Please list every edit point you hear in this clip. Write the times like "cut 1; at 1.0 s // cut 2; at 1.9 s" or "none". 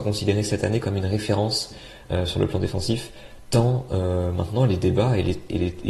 none